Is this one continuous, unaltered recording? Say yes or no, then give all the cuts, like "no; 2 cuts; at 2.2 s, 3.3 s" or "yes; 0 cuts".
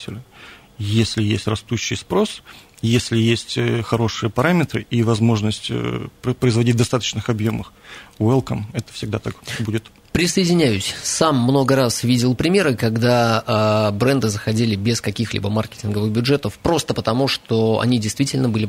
yes; 0 cuts